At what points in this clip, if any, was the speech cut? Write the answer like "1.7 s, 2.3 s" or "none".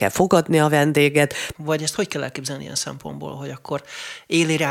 1.5 s